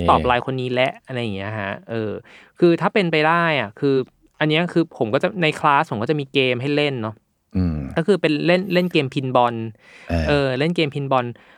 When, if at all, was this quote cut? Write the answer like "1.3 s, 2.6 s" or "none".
none

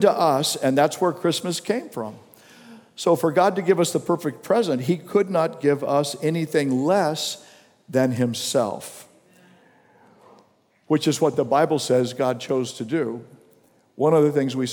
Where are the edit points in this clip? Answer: none

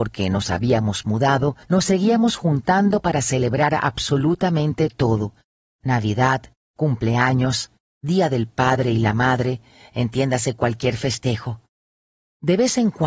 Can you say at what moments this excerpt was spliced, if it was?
none

